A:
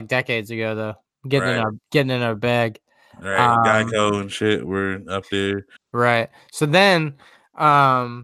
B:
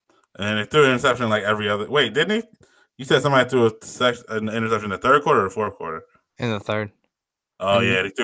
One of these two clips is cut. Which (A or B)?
A